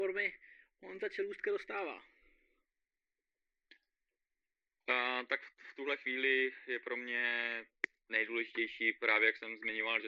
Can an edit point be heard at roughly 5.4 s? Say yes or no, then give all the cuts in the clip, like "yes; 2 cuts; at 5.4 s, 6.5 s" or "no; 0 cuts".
no; 0 cuts